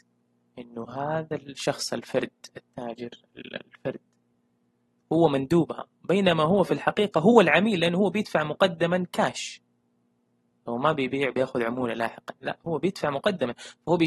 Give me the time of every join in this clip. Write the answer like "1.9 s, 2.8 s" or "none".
none